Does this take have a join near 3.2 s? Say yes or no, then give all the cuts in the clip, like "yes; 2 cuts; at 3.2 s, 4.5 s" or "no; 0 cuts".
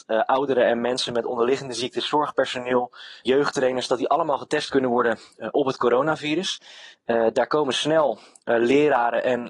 yes; 1 cut; at 3.2 s